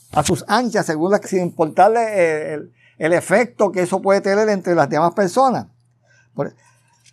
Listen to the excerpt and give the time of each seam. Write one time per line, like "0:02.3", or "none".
0:01.2